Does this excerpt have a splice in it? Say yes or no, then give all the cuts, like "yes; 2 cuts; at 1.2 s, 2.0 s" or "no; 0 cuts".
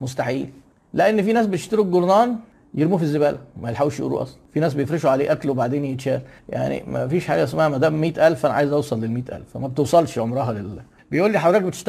yes; 1 cut; at 11.0 s